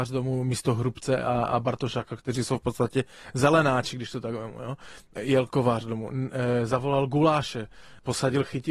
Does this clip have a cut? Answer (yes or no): no